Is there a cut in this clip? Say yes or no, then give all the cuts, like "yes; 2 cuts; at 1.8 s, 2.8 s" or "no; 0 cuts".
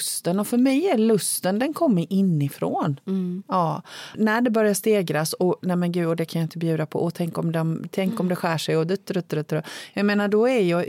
yes; 1 cut; at 4.1 s